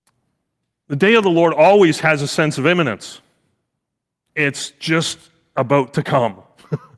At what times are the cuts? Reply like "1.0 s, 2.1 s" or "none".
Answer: none